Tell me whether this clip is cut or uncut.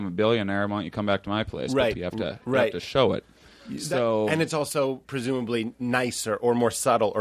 cut